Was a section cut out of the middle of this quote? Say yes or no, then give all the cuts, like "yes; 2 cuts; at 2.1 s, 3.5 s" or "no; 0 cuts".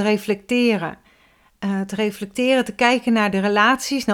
no; 0 cuts